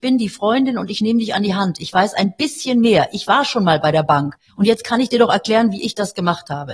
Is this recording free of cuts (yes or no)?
no